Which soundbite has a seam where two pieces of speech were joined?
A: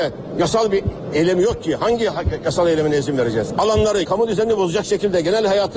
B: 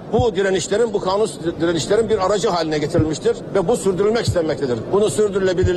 A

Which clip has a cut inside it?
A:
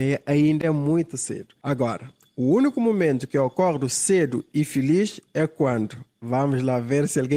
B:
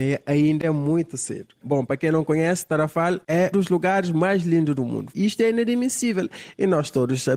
B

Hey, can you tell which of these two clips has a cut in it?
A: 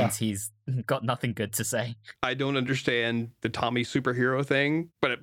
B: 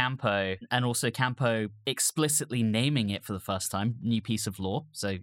A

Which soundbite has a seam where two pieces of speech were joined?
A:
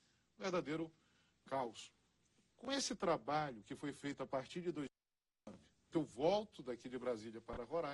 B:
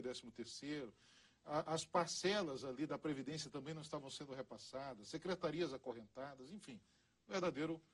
A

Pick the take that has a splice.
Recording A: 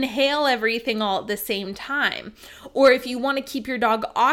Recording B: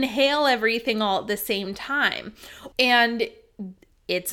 B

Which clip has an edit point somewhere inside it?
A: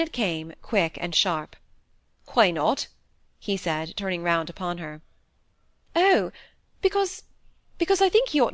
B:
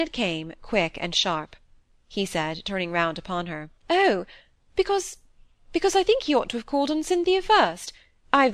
B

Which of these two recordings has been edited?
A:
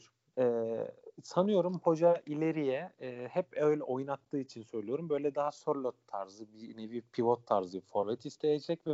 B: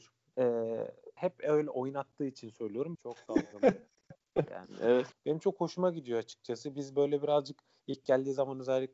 B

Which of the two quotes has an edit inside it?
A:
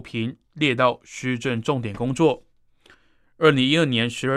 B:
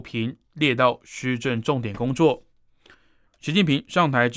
B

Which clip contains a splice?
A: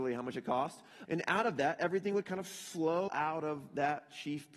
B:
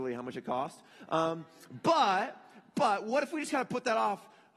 A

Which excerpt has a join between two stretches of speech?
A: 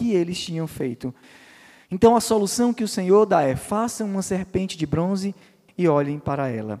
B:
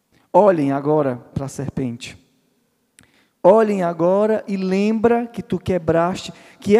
A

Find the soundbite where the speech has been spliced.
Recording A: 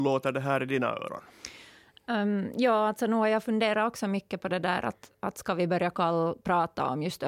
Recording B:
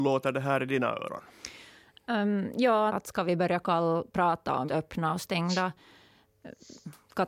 B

